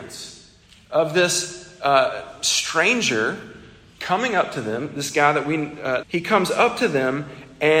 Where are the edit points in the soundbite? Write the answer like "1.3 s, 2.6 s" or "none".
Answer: 6.0 s